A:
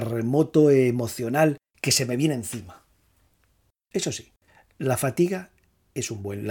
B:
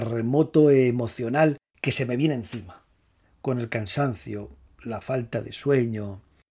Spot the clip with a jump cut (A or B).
B